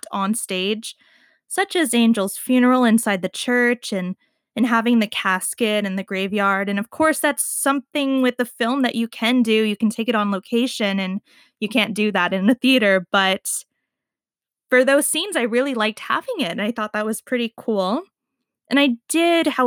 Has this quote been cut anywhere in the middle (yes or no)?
no